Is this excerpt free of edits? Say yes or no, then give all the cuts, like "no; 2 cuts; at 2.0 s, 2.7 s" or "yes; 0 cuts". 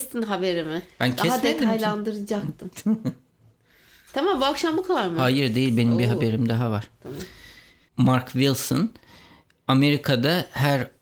no; 1 cut; at 7.9 s